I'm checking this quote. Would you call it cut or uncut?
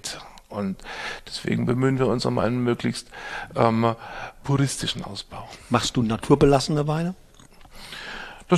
uncut